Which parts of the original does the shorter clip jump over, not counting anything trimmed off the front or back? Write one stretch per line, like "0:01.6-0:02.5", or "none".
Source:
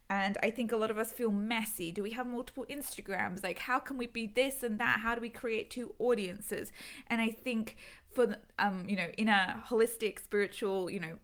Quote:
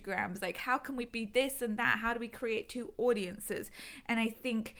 none